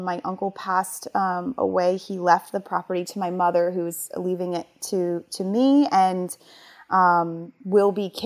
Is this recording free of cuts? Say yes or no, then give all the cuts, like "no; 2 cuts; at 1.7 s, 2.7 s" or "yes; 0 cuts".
yes; 0 cuts